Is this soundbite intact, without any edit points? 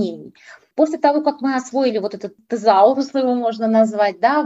yes; 0 cuts

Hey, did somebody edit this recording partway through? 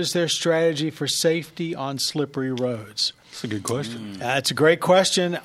no; 0 cuts

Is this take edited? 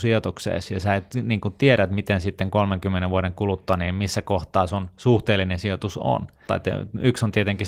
yes; 1 cut; at 6.5 s

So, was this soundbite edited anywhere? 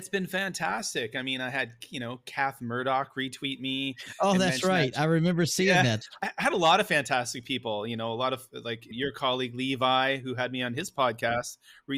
no; 0 cuts

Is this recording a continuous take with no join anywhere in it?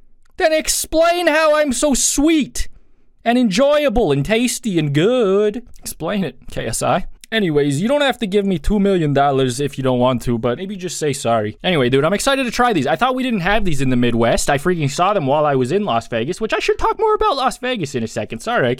yes; 0 cuts

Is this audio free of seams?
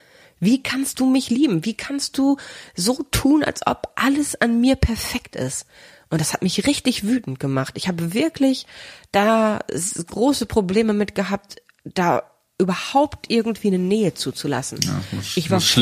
yes; 0 cuts

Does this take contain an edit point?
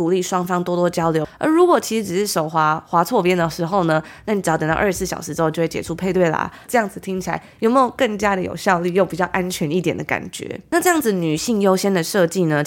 yes; 1 cut; at 6.7 s

